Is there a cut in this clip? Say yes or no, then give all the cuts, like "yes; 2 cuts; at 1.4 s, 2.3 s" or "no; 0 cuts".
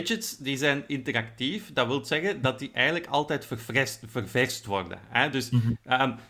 no; 0 cuts